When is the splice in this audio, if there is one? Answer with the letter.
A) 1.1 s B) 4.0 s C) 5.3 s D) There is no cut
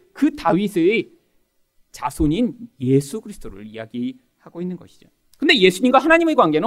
C